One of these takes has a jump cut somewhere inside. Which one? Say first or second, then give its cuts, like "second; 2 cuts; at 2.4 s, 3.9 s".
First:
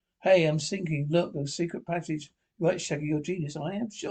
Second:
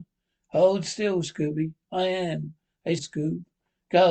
second; 1 cut; at 3.0 s